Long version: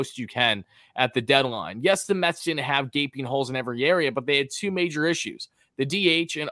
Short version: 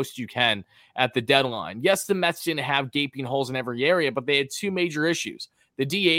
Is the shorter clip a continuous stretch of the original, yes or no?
yes